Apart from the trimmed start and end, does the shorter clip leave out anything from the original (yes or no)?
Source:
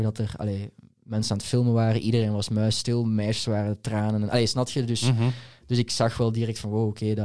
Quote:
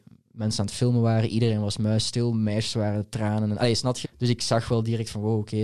yes